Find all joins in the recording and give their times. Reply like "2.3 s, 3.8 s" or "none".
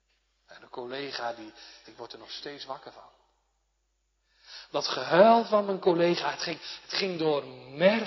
1.8 s